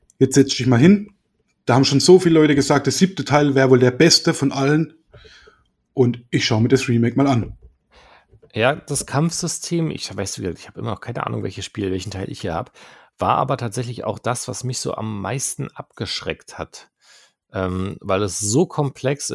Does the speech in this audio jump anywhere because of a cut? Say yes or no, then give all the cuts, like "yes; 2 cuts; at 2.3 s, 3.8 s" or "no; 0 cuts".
no; 0 cuts